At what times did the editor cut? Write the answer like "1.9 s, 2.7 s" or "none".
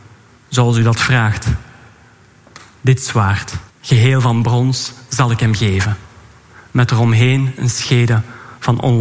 3.7 s

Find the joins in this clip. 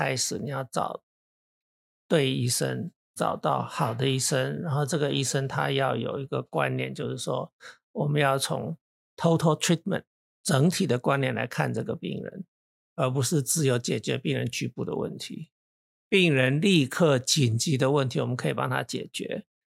none

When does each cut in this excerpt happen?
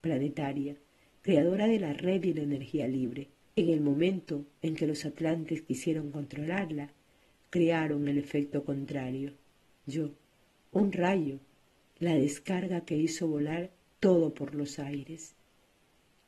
3.5 s

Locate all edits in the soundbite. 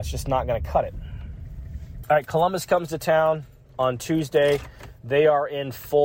2.0 s

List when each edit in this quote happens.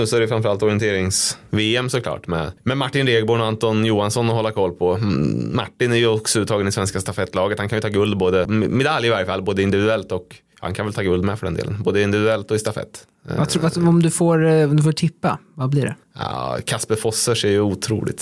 8.4 s

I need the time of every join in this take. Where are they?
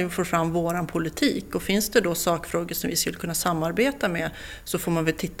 none

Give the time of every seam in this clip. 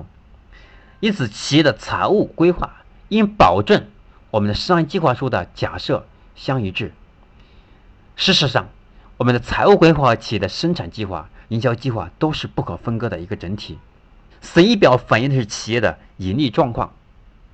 11.4 s, 14.3 s

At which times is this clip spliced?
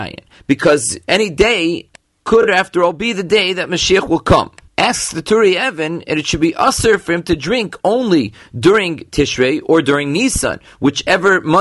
none

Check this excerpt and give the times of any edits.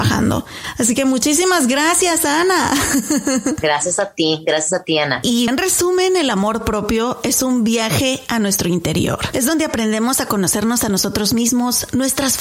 5.5 s

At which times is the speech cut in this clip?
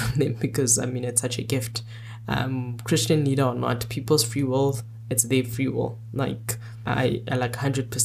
none

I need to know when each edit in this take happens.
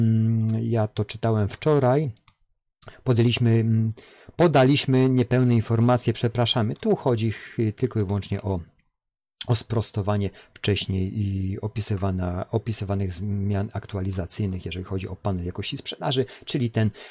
10.5 s

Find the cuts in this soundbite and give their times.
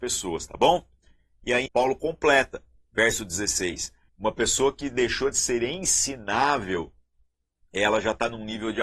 1.7 s, 4.1 s

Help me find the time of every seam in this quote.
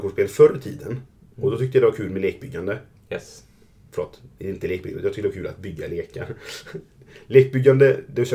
none

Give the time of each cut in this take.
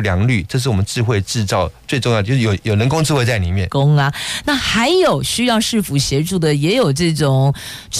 2.6 s, 3.7 s

